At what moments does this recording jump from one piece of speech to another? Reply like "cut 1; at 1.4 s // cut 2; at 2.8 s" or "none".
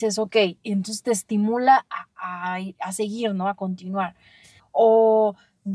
cut 1; at 4.6 s